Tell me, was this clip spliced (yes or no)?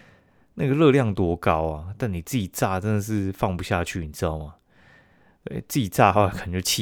no